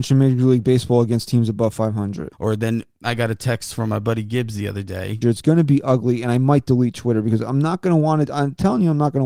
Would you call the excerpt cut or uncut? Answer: cut